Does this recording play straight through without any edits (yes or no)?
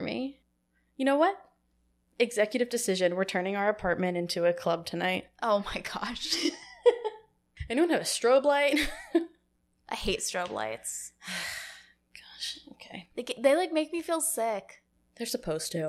yes